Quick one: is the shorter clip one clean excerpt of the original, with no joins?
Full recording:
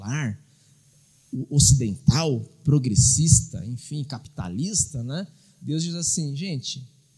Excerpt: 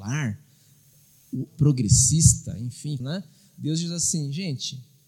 no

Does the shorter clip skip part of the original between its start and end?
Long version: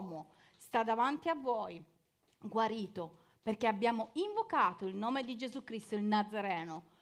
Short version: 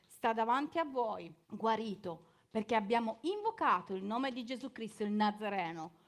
yes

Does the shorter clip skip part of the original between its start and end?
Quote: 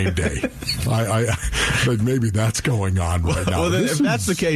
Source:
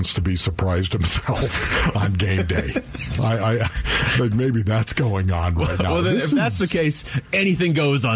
no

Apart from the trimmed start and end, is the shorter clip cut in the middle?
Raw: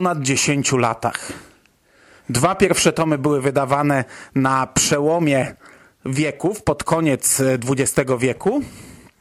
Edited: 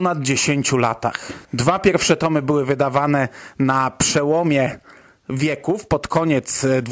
yes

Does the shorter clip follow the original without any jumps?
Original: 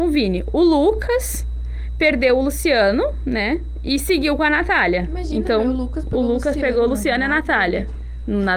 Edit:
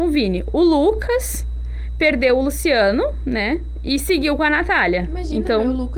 yes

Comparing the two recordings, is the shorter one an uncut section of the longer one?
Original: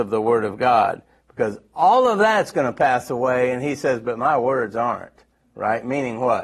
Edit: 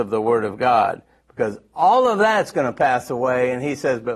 yes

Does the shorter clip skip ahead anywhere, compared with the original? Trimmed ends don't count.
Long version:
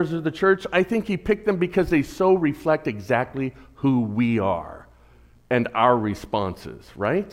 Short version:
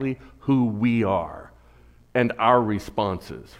no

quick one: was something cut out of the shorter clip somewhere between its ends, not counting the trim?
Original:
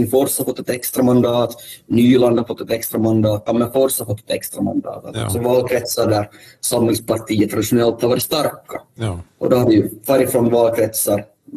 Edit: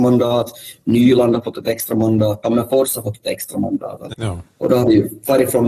yes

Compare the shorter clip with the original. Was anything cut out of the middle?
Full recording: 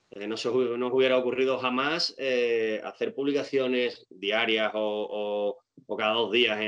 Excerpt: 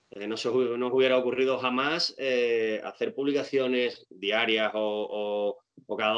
no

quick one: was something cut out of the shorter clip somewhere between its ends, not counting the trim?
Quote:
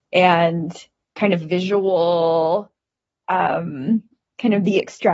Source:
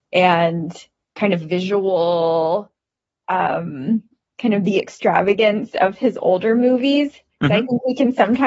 no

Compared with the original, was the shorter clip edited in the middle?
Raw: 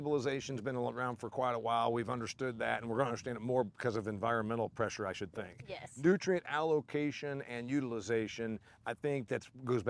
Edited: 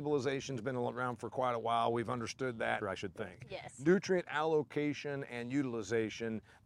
yes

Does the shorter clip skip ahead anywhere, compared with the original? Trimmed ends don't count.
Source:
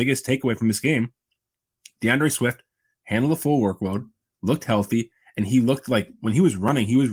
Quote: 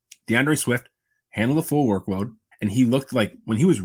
yes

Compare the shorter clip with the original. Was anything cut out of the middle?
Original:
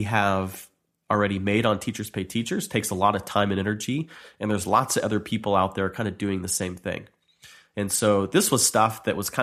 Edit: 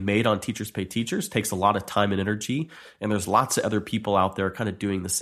no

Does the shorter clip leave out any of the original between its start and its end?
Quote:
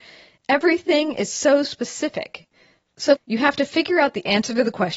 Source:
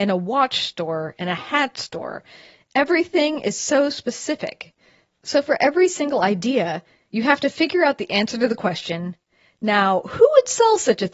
yes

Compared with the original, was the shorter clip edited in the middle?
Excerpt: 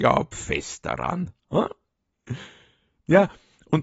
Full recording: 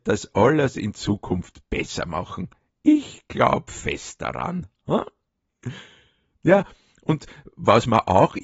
no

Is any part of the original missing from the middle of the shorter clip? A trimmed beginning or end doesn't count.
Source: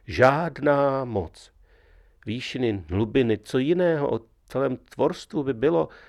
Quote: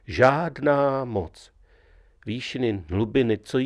no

